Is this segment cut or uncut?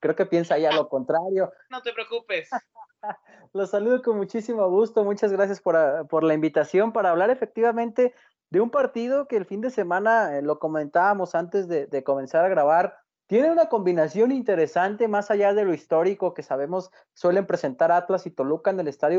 cut